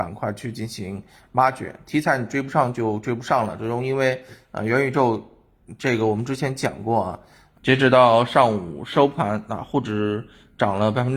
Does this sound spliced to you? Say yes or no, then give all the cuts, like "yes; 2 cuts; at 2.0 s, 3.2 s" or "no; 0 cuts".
yes; 1 cut; at 7.5 s